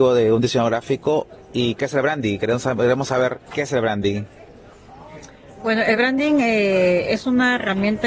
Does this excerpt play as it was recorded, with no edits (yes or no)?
no